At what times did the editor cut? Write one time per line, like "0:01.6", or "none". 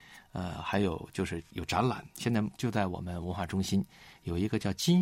none